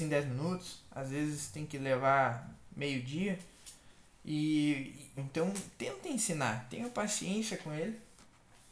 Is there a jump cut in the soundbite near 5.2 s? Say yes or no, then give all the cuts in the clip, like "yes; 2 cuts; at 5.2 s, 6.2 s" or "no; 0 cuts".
yes; 1 cut; at 5.2 s